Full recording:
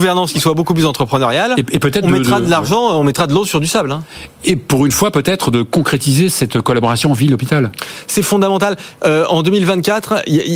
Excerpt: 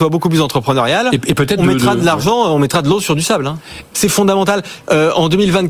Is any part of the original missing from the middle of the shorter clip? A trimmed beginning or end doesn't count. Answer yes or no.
yes